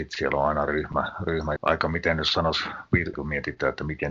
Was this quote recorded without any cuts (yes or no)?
no